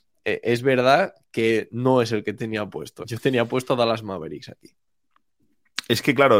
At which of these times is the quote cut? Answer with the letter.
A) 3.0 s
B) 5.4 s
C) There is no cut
A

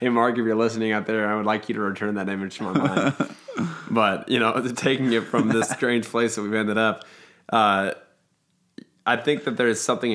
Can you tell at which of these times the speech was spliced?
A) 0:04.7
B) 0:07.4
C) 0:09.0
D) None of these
A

